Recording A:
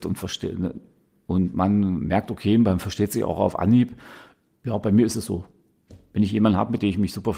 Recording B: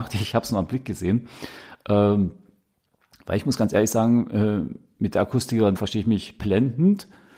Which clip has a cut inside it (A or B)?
B